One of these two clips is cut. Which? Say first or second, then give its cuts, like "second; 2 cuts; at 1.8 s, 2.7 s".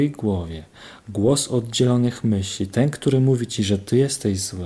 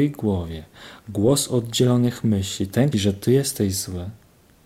second; 1 cut; at 2.9 s